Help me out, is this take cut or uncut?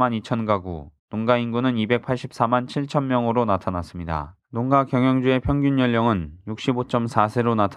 cut